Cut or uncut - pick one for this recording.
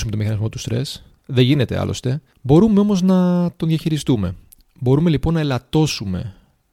cut